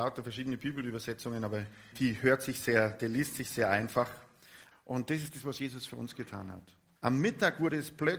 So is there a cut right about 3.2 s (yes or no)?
no